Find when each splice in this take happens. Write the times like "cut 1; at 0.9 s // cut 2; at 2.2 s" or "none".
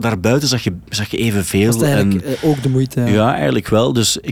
none